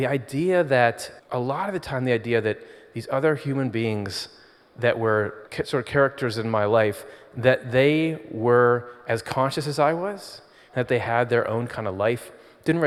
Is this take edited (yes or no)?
yes